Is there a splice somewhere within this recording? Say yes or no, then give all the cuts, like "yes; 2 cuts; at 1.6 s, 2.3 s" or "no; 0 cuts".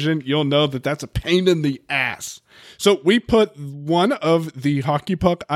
yes; 1 cut; at 2.6 s